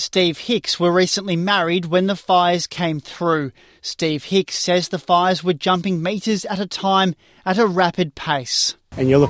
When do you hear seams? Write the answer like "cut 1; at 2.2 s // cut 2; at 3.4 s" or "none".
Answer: none